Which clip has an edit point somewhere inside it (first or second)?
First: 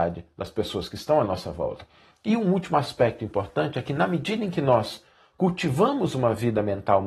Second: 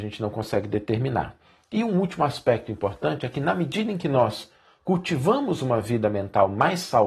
first